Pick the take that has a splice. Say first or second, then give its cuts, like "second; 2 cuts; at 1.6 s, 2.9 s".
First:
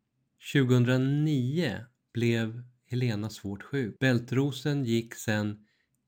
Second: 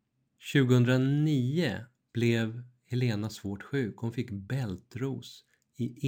first; 1 cut; at 4.0 s